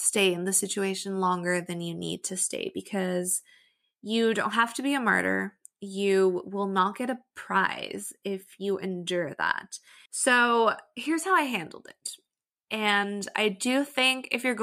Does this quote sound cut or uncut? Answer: cut